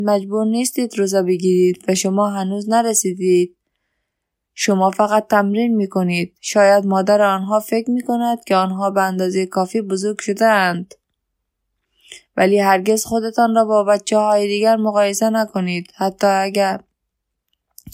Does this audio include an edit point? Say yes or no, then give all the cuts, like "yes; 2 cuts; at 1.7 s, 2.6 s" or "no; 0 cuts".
no; 0 cuts